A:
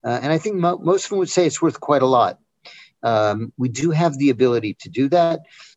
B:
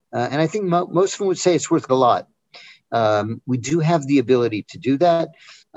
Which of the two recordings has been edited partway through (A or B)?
B